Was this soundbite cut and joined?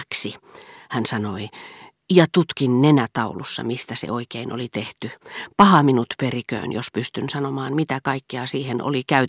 no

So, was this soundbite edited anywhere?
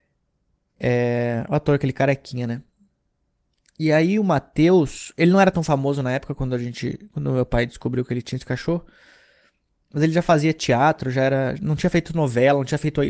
no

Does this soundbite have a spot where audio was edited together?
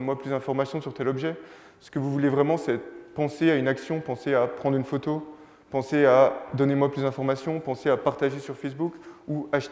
no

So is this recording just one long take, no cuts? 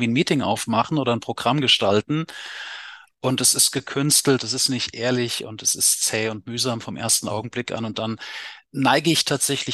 yes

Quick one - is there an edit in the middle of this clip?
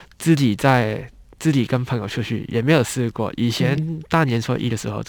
no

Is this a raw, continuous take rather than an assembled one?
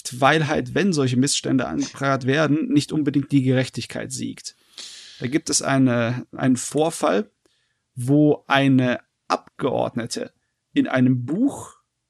yes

